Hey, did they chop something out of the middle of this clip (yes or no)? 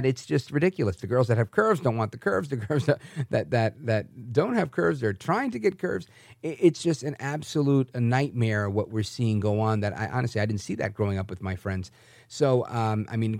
no